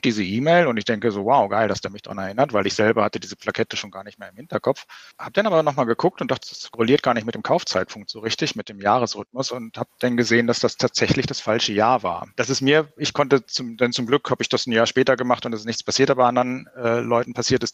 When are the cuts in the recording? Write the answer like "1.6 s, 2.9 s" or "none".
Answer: 6.4 s, 12.3 s